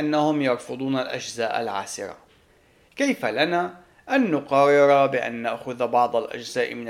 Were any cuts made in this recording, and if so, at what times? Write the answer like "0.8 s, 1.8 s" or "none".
2.9 s